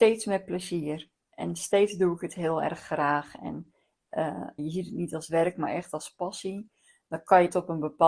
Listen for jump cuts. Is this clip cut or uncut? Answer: cut